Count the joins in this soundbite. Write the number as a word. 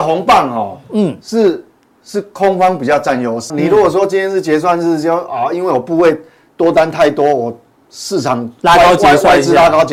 one